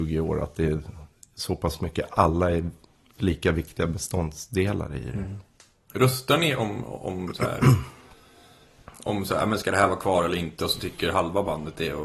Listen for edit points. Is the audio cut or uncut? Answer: uncut